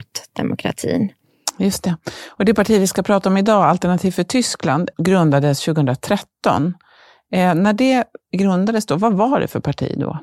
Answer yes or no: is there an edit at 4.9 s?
yes